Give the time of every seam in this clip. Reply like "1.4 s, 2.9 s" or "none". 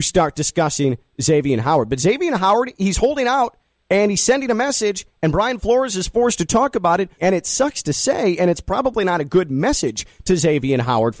7.2 s